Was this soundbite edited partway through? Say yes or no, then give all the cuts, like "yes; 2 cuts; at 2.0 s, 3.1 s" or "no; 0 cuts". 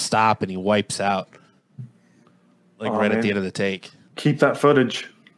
no; 0 cuts